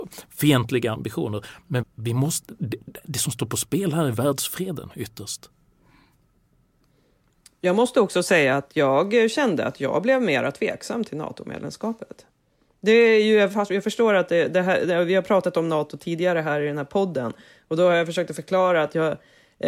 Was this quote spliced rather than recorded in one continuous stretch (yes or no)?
yes